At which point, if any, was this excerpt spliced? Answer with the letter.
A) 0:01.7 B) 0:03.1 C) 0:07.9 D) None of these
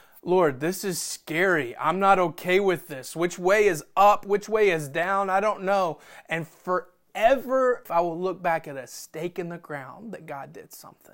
C